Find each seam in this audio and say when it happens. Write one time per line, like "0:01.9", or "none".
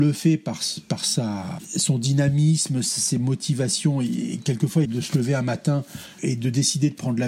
0:04.8